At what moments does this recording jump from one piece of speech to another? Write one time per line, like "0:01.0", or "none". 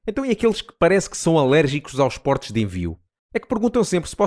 0:03.2